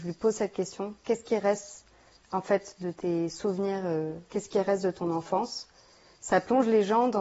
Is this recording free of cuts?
yes; 0 cuts

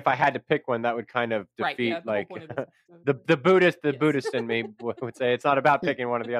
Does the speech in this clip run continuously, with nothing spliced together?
yes; 0 cuts

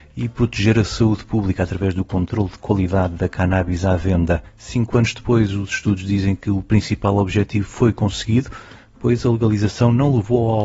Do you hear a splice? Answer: no; 0 cuts

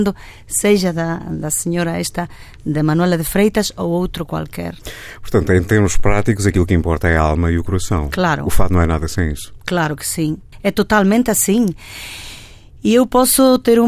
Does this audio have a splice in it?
yes; 1 cut; at 1.2 s

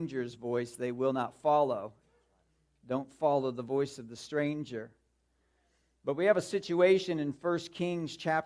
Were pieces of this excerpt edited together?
no; 0 cuts

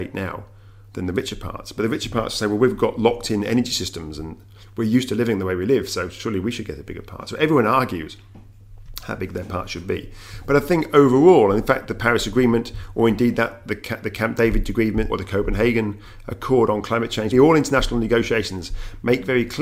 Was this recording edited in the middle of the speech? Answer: yes; 2 cuts; at 15.1 s, 17.3 s

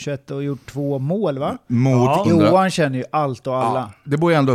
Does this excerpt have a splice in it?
yes; 1 cut; at 2.2 s

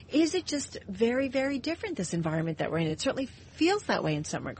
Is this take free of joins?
yes; 0 cuts

